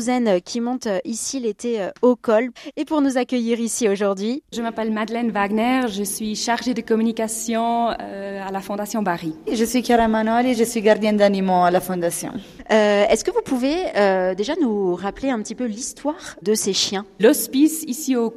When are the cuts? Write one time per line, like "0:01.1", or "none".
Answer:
none